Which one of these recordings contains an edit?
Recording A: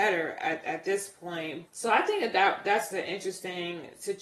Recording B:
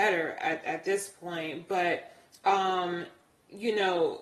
A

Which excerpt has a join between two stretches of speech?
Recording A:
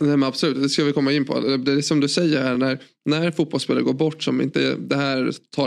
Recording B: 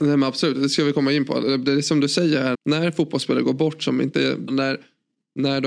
B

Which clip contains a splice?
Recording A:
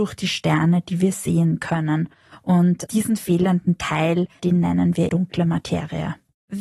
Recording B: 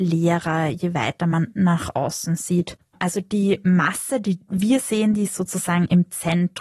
A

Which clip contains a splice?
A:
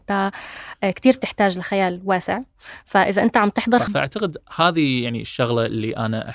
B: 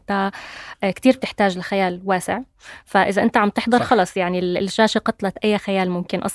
A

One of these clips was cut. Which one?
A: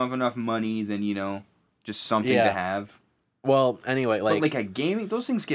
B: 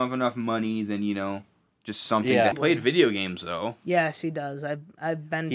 B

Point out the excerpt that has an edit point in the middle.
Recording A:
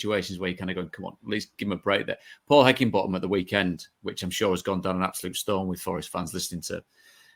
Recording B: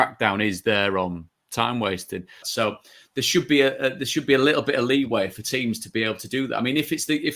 B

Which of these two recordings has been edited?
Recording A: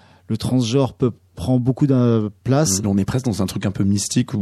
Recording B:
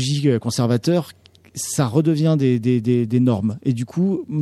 A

